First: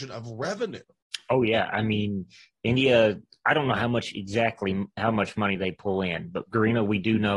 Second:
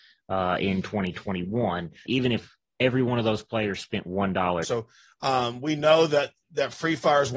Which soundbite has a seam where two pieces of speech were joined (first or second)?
second